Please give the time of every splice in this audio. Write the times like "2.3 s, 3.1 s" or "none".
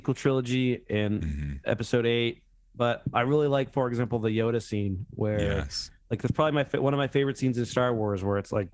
none